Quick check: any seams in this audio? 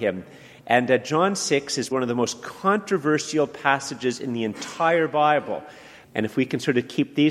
yes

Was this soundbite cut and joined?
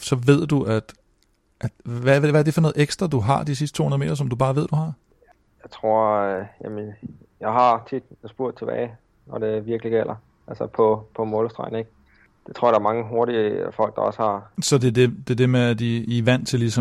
yes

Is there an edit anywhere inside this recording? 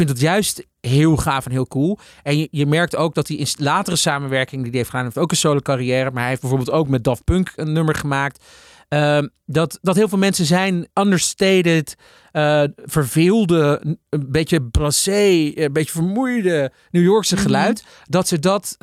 yes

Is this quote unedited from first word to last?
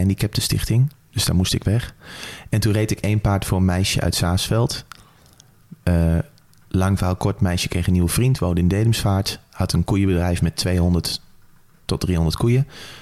yes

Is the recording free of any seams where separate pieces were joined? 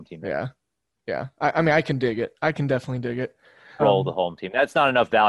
no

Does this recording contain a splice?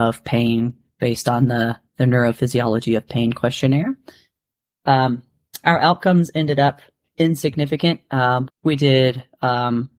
yes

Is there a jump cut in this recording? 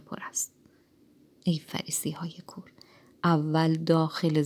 no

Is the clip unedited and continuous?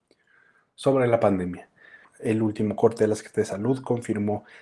no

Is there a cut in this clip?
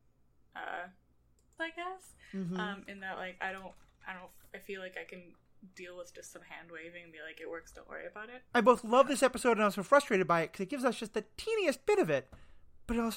yes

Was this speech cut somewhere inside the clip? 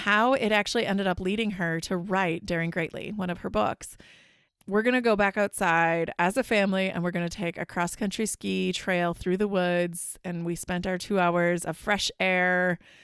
yes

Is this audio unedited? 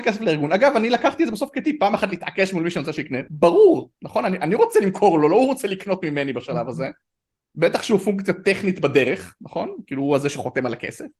yes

